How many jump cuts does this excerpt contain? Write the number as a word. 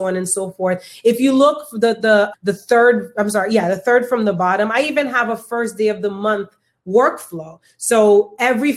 one